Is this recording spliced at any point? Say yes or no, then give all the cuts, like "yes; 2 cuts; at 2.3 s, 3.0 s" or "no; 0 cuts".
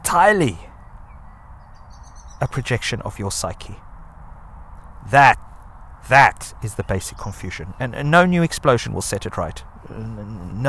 no; 0 cuts